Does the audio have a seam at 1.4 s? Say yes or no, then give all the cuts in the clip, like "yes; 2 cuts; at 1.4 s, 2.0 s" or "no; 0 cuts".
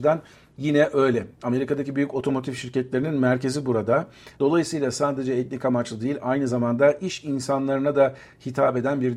no; 1 cut; at 4.3 s